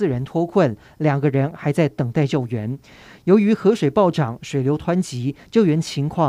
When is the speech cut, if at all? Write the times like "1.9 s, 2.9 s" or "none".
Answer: none